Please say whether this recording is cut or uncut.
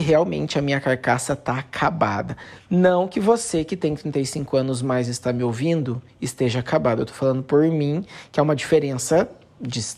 uncut